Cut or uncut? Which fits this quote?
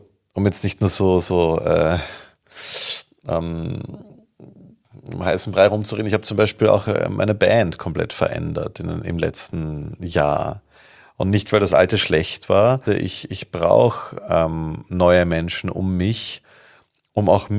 cut